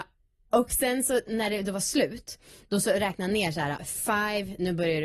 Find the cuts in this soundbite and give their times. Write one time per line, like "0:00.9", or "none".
0:03.8